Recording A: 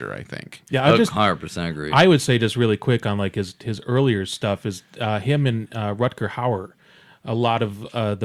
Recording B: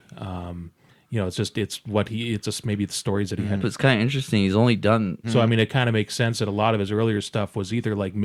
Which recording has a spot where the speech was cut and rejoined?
B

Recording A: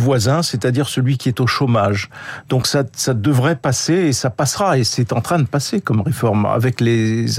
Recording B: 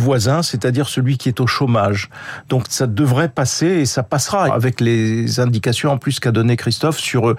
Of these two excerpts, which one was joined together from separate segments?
B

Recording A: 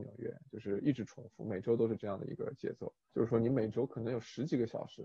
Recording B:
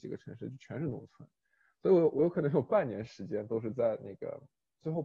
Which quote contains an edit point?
A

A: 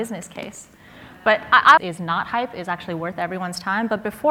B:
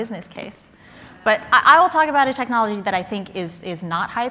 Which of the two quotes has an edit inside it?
A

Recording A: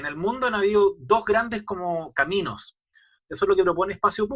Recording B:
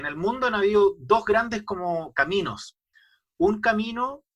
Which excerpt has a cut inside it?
A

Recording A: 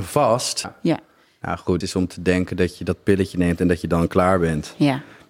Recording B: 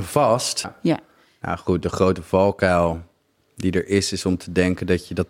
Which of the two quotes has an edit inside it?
A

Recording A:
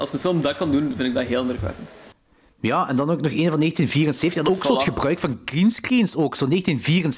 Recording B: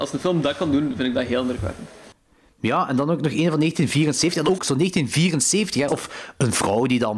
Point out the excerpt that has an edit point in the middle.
B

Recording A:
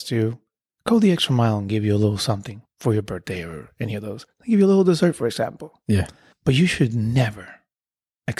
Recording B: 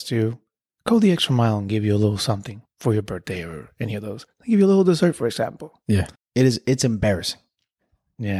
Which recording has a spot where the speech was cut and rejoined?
B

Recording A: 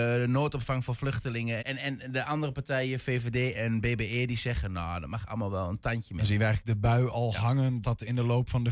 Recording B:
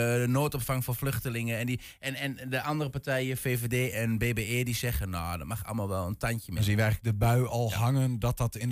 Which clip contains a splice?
A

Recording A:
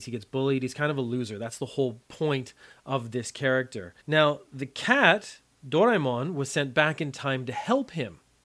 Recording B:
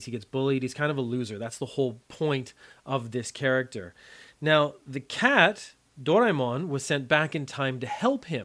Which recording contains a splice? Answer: A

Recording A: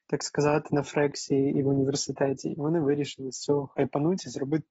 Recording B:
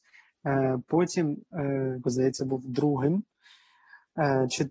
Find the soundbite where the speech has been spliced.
B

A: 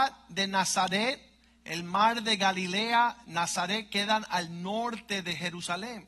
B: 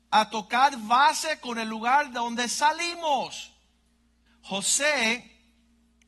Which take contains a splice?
B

